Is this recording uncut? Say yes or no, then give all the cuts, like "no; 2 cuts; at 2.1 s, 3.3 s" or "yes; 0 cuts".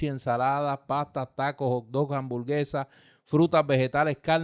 yes; 0 cuts